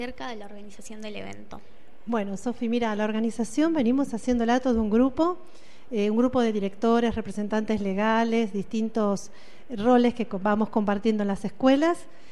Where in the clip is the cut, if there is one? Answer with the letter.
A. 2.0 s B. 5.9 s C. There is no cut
C